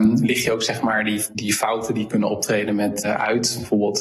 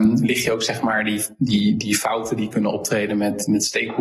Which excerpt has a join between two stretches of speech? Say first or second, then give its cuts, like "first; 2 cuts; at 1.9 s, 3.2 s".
first; 2 cuts; at 1.3 s, 3.0 s